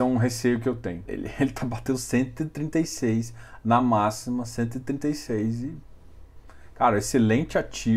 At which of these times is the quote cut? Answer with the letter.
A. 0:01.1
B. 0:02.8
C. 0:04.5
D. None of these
A